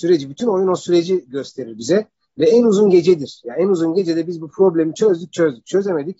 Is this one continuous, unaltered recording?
yes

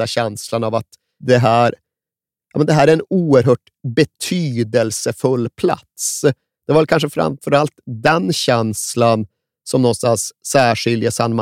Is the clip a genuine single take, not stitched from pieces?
yes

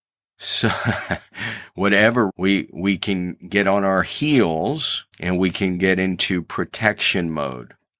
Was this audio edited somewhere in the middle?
yes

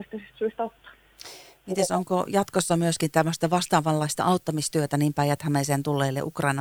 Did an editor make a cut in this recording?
no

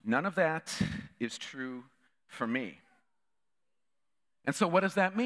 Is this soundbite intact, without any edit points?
yes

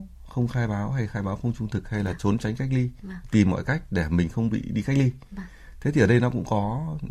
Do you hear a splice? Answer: no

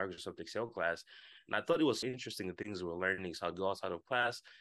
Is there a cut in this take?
yes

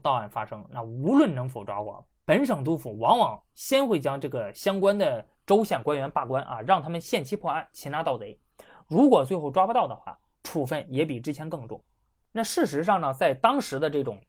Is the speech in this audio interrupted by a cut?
no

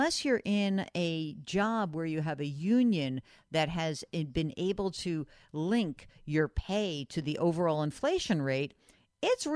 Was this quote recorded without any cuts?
yes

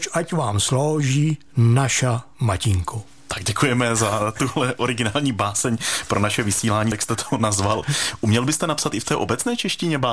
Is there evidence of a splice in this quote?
yes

